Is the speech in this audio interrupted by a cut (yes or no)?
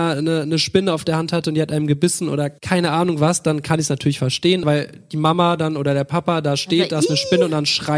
yes